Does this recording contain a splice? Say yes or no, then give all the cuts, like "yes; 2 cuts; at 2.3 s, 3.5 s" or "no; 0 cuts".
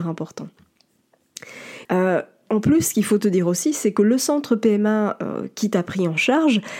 yes; 1 cut; at 1.8 s